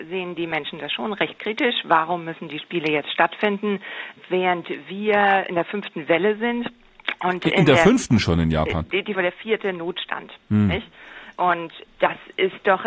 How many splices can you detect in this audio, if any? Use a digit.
1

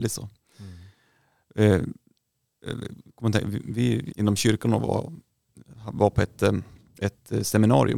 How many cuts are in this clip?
1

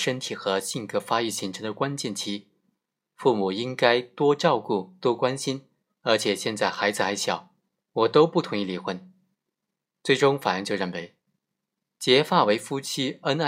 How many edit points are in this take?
2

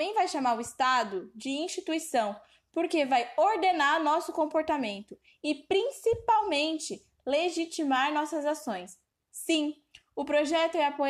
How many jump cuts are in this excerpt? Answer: 1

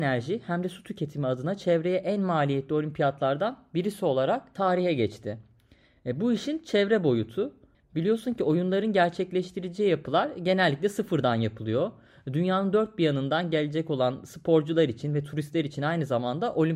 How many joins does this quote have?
1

